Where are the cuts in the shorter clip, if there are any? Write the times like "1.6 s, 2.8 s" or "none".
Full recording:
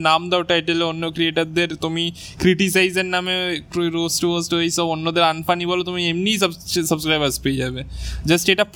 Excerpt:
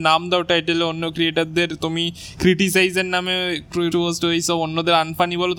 3.9 s